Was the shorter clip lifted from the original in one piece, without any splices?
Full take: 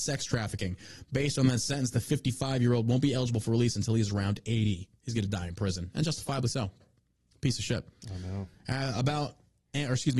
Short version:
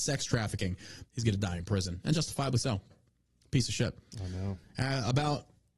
no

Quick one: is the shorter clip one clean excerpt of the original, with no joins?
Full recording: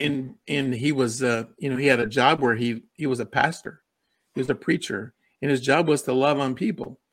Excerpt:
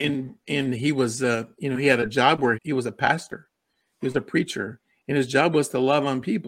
no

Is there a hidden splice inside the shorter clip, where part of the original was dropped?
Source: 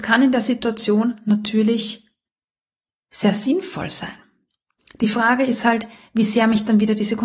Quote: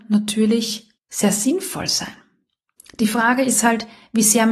yes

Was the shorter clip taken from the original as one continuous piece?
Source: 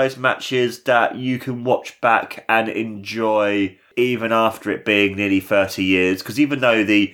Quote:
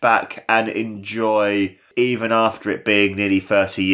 yes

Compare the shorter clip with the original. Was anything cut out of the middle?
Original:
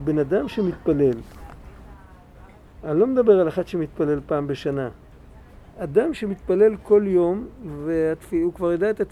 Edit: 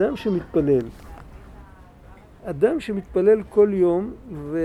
yes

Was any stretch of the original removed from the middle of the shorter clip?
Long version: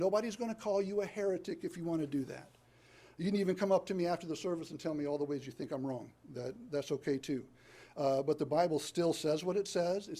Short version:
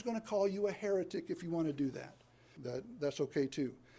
yes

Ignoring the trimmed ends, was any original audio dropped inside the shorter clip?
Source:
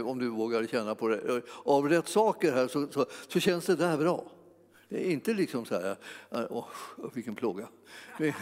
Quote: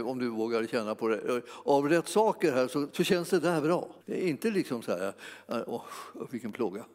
yes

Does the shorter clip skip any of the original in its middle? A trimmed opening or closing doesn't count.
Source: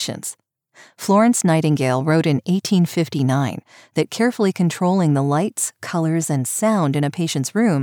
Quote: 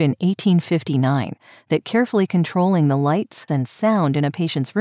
yes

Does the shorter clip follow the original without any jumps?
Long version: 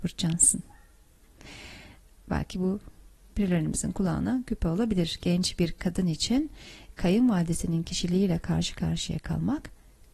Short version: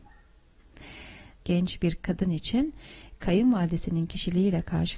no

